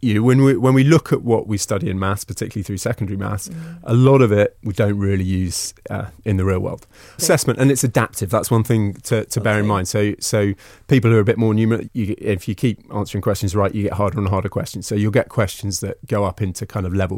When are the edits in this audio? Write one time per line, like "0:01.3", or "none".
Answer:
0:07.2
0:11.8